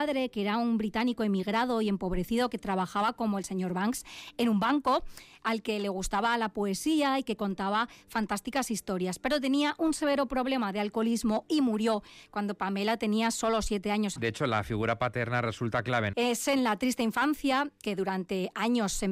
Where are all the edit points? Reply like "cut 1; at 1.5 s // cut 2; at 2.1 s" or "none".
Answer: cut 1; at 14.2 s // cut 2; at 16.1 s